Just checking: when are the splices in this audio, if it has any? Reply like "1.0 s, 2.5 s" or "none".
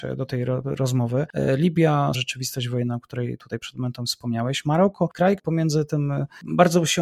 2.1 s, 5.4 s